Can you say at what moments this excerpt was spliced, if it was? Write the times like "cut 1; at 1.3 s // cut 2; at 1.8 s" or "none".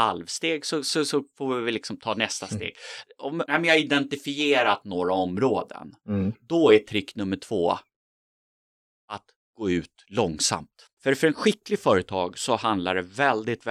cut 1; at 3.5 s // cut 2; at 11.0 s